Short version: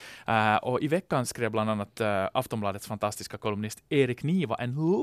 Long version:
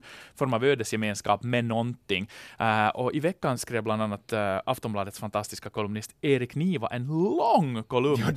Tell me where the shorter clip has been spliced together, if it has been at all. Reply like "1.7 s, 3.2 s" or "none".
none

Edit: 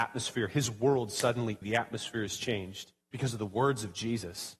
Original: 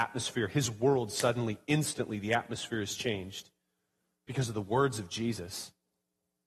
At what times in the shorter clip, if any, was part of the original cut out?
1.6 s, 3.0 s

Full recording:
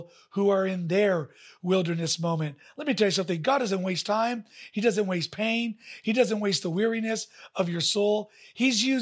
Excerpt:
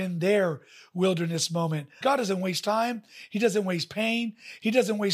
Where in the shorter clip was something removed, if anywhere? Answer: 2.0 s

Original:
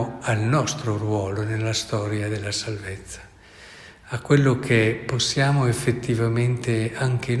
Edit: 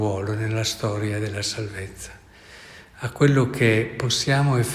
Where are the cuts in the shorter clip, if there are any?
none

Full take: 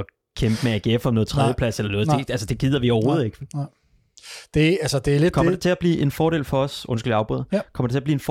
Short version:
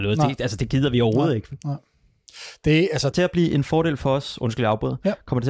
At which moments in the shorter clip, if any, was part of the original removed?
3.1 s

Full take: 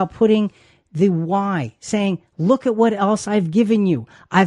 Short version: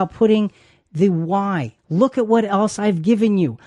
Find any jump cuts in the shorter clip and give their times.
1.8 s

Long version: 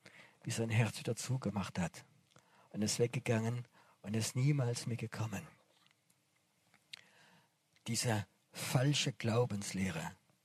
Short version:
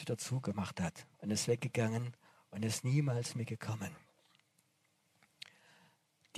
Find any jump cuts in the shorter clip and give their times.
1.1 s

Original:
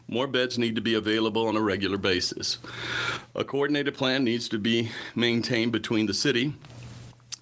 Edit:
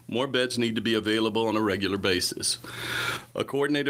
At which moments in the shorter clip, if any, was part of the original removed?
none

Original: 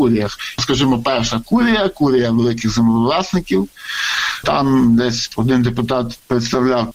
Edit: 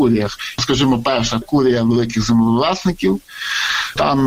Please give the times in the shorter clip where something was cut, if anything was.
1.4 s

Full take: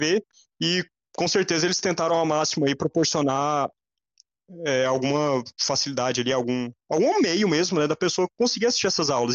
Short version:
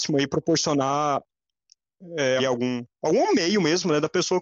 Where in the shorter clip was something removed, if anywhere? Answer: 2.4 s

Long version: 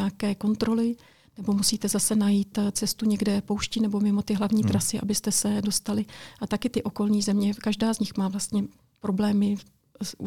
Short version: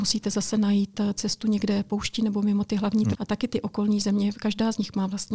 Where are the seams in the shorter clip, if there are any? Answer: 3.1 s

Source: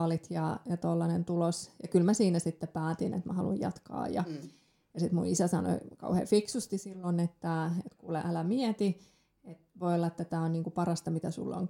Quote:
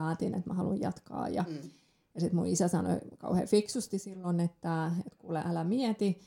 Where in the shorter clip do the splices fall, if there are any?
none

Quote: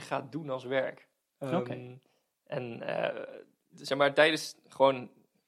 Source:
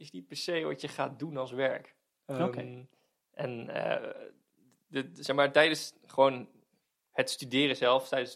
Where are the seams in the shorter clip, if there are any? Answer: 3.7 s

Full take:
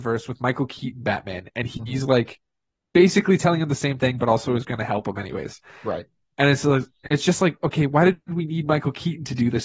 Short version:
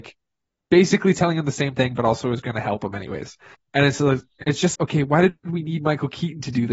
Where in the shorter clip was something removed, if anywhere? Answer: 3.5 s, 4.8 s

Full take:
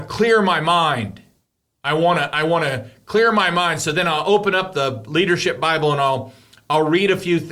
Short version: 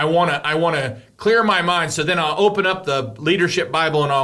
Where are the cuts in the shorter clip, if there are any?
none

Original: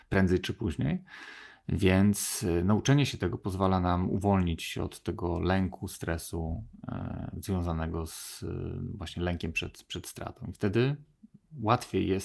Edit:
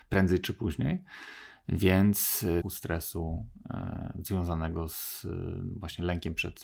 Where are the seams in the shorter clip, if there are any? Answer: 2.6 s

